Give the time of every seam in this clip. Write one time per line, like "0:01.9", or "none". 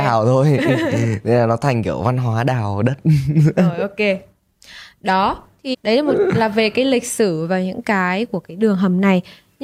0:05.7